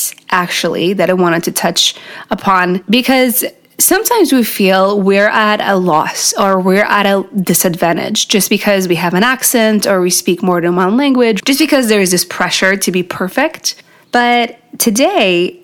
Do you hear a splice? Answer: yes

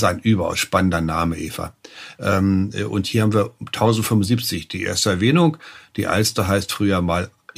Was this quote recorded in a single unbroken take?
no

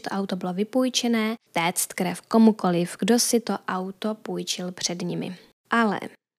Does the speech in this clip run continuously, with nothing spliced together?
no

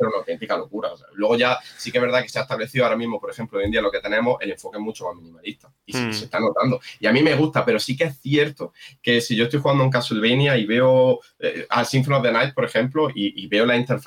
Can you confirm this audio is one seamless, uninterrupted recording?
yes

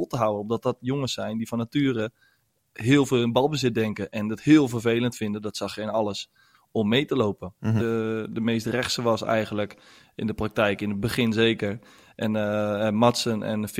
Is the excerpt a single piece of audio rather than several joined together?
no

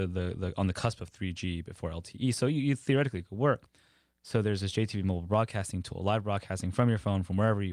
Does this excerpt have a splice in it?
no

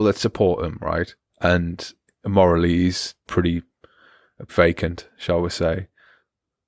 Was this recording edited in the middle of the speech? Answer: yes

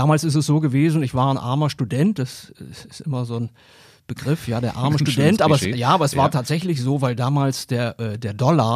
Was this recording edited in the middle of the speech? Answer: no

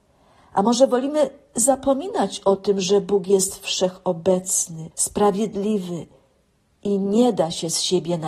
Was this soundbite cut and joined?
yes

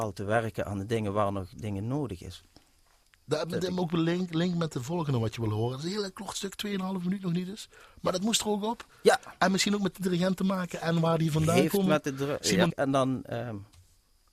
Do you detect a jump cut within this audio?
yes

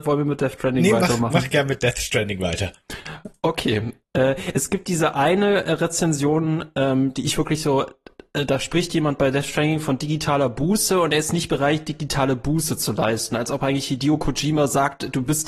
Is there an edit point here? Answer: no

